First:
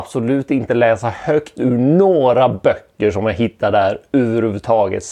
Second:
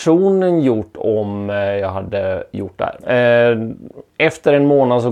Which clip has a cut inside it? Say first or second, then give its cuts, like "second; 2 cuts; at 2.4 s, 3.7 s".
second; 1 cut; at 3.0 s